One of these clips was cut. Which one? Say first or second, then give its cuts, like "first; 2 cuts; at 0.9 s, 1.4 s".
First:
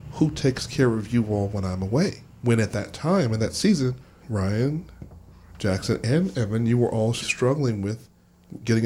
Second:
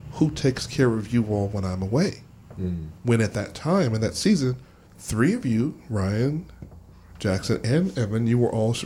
first; 3 cuts; at 2.4 s, 4.2 s, 7.2 s